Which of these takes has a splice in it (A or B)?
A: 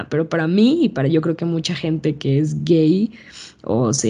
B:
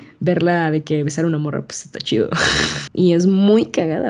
B